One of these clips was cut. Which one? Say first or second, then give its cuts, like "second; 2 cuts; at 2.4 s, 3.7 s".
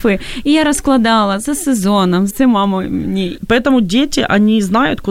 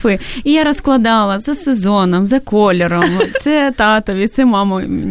first; 2 cuts; at 2.3 s, 3.4 s